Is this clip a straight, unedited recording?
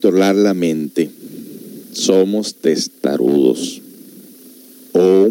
no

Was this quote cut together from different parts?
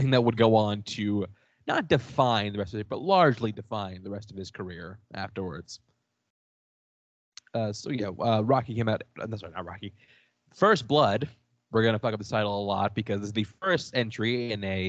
no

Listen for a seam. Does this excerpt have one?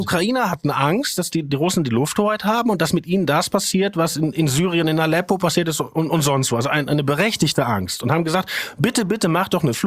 no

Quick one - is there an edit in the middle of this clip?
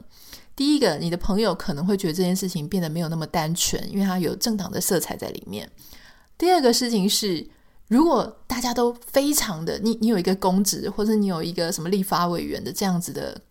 no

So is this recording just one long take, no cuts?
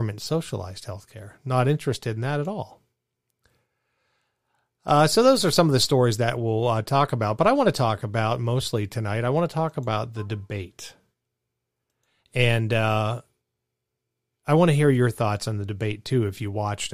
yes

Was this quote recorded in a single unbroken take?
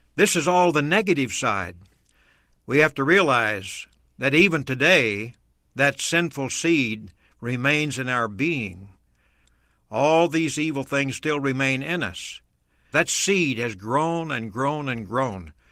no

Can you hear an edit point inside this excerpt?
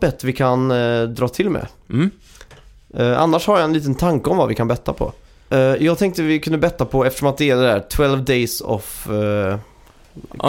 yes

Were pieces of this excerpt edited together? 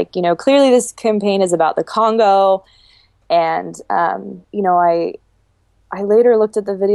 yes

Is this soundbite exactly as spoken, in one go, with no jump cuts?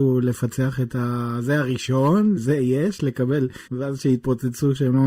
no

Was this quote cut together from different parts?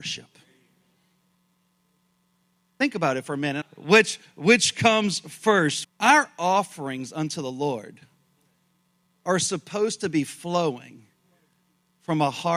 yes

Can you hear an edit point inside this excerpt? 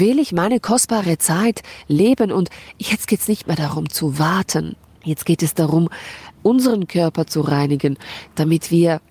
yes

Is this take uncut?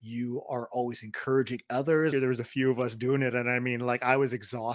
no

